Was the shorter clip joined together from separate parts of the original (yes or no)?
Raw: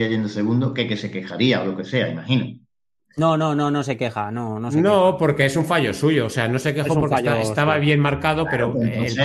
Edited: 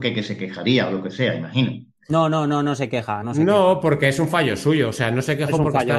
yes